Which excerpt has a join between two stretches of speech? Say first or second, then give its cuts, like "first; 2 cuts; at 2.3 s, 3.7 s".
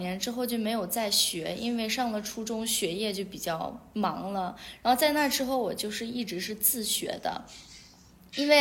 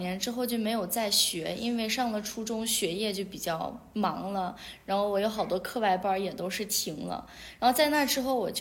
first; 1 cut; at 4.8 s